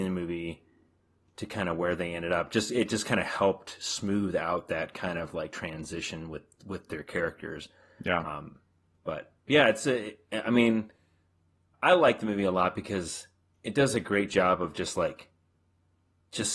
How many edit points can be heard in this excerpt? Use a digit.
2